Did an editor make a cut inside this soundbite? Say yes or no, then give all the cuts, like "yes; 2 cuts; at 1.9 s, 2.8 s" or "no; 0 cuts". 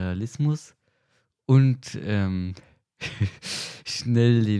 no; 0 cuts